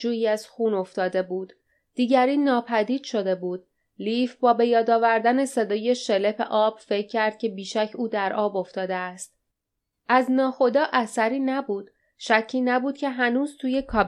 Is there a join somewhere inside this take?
no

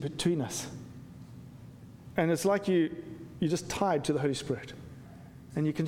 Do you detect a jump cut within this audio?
yes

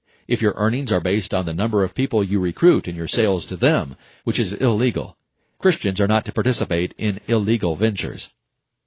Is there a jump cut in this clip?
yes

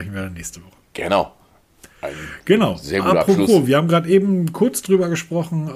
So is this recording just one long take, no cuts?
yes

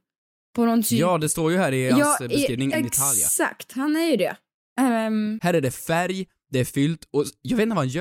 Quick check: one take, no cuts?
no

